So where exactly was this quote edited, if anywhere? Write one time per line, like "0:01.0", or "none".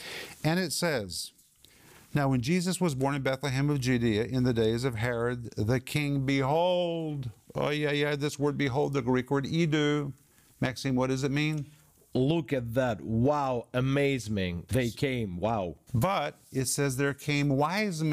0:14.7
0:15.9